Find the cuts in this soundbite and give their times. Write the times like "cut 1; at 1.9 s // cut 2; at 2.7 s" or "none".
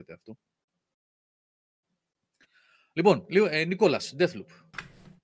none